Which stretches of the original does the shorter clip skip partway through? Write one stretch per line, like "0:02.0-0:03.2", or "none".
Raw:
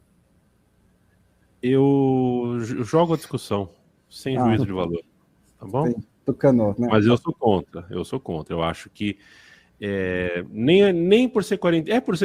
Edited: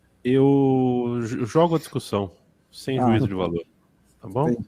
none